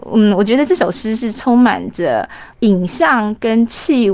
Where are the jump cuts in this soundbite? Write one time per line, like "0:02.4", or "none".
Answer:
none